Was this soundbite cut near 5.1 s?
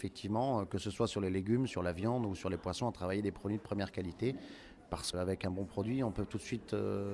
yes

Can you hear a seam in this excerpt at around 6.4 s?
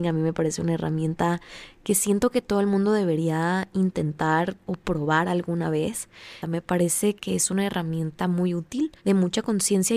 no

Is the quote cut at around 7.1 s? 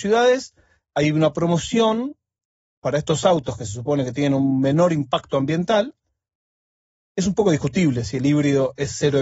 yes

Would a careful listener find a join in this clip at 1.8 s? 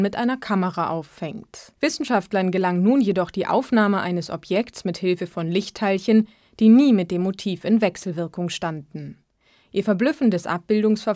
yes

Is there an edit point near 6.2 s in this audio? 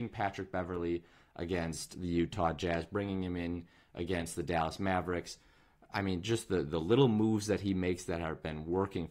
no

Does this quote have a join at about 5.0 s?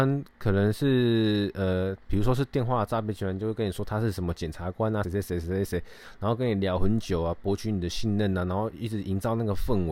yes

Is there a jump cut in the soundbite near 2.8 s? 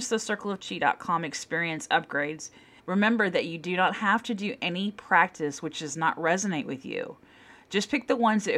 yes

